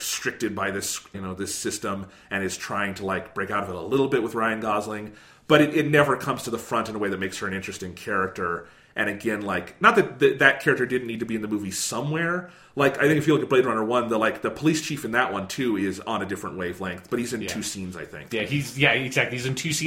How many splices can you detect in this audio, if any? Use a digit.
1